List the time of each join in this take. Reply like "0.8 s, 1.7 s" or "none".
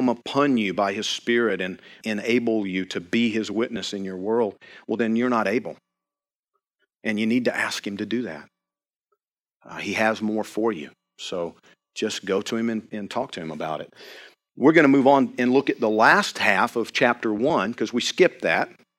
2.0 s